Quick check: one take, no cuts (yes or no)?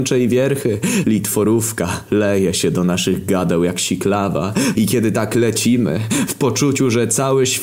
no